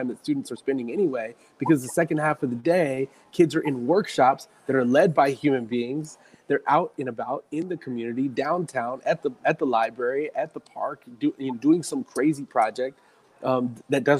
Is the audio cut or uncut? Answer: uncut